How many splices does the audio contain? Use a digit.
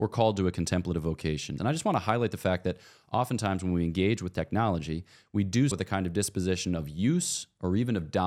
2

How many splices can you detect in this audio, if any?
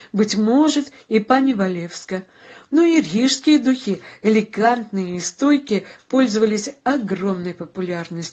0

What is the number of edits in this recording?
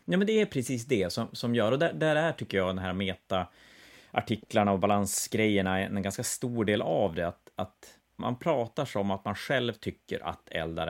1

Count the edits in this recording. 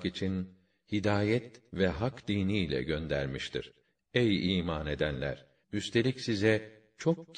2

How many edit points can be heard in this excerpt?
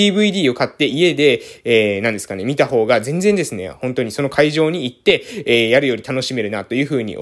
0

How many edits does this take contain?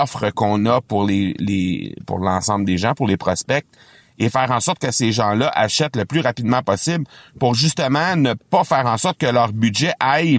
0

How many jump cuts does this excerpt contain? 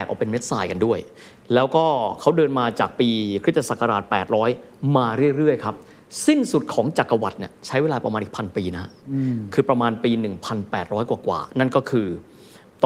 0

